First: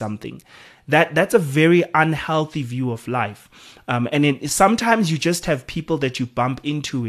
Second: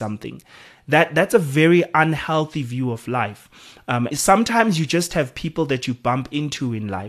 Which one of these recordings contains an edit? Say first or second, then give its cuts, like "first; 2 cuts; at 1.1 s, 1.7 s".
second; 1 cut; at 4.1 s